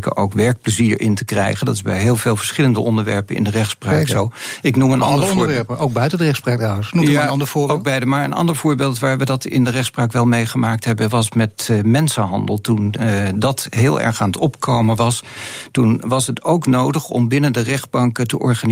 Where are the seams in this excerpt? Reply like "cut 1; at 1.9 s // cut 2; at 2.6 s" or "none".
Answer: none

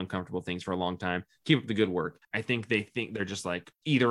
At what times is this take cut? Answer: cut 1; at 2.2 s

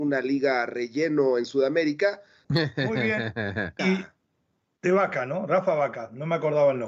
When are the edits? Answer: cut 1; at 2.4 s // cut 2; at 3.8 s

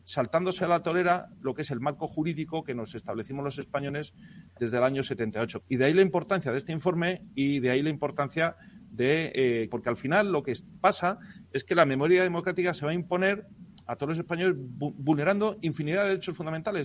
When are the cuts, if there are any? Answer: cut 1; at 5.6 s // cut 2; at 9.7 s

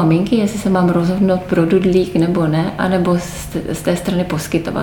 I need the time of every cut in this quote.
none

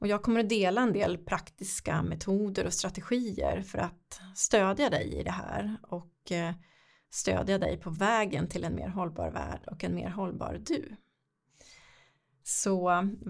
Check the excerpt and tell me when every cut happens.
none

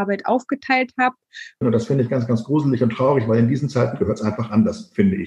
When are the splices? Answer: cut 1; at 1.6 s

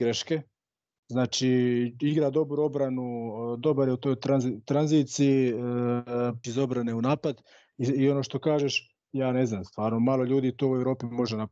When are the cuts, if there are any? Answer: cut 1; at 6.4 s // cut 2; at 9.1 s

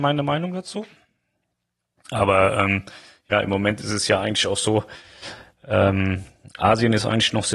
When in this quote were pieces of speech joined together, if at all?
cut 1; at 2.0 s

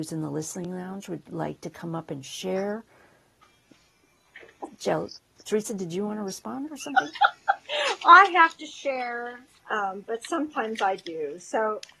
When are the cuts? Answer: cut 1; at 9.6 s

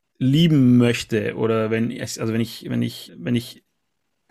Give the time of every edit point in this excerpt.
cut 1; at 3.1 s

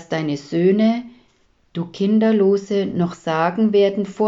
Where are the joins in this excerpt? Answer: none

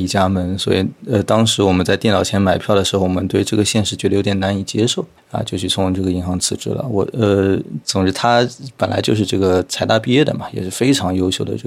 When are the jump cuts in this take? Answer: none

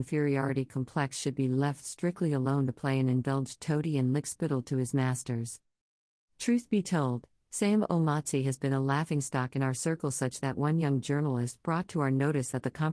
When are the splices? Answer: none

